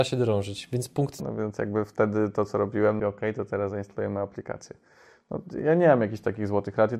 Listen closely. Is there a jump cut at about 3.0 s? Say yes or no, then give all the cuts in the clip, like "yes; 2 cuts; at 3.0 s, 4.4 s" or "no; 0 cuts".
yes; 2 cuts; at 1.2 s, 3.0 s